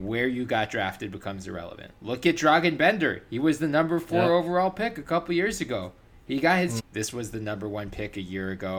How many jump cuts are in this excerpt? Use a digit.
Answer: 2